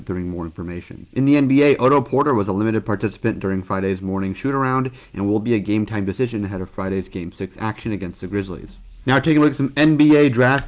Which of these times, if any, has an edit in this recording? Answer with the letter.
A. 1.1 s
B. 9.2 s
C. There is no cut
C